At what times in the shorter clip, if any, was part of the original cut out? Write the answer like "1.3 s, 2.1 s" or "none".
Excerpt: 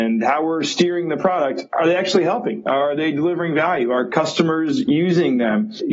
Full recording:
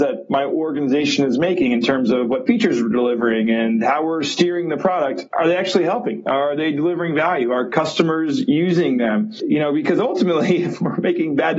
none